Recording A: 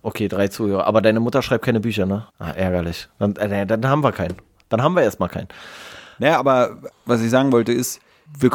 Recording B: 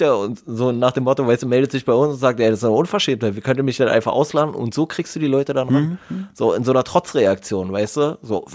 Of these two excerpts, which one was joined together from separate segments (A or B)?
A